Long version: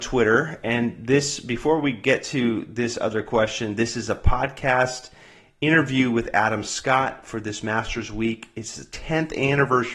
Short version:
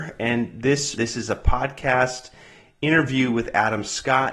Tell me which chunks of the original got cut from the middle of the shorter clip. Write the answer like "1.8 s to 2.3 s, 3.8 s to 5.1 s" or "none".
1.4 s to 3.8 s